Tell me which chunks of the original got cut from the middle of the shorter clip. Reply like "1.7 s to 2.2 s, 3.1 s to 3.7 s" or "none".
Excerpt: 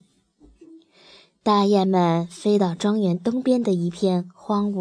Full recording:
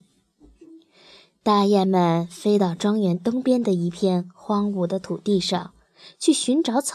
none